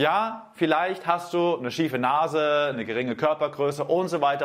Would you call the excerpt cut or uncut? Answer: cut